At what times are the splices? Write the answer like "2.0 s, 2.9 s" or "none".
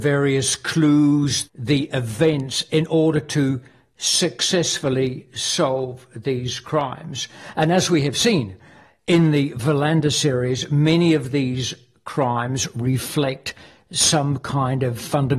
1.4 s